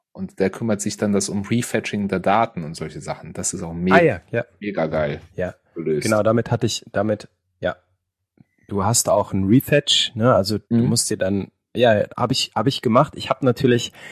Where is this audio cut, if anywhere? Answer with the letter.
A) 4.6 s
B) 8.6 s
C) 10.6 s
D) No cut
C